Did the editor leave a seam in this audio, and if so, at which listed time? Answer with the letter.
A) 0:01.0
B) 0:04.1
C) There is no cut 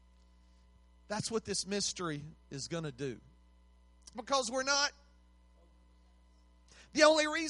B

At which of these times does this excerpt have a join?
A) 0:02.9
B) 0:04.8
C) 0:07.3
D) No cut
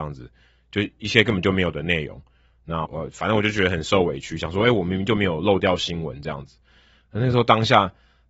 A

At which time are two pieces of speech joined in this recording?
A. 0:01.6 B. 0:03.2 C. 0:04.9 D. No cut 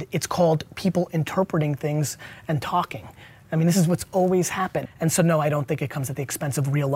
C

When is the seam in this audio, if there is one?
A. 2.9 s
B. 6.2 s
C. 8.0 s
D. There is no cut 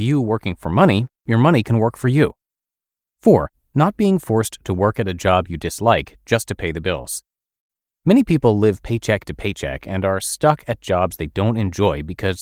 D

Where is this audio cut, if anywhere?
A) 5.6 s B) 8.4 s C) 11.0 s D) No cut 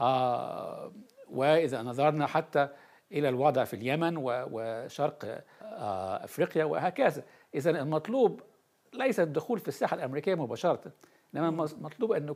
A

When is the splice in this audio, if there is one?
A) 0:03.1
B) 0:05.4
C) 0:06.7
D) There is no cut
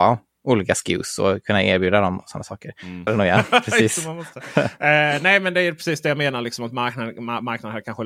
A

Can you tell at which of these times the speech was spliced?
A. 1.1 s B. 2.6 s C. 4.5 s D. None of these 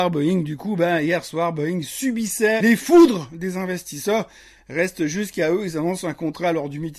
B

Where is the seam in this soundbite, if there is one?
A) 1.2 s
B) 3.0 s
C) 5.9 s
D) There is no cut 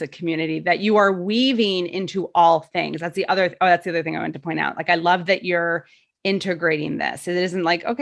D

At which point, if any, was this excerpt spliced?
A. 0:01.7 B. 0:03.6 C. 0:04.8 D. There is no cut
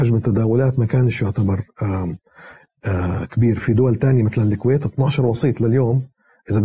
B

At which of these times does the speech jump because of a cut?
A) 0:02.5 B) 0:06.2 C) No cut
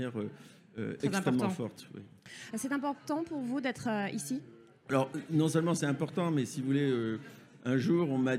A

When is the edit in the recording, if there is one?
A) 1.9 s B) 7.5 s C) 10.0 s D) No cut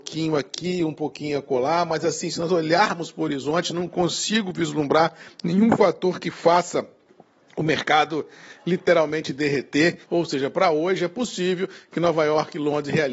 C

